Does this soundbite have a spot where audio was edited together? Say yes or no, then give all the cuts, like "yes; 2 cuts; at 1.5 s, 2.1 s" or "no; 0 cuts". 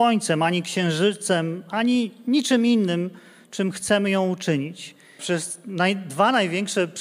yes; 1 cut; at 5.2 s